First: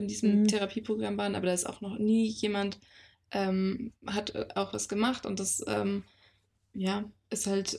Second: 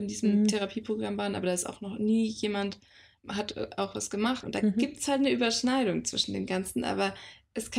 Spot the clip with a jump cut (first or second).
second